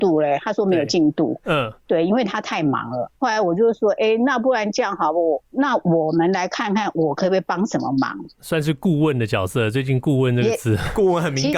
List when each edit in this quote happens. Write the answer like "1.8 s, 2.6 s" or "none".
none